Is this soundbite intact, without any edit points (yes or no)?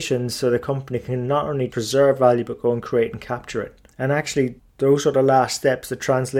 no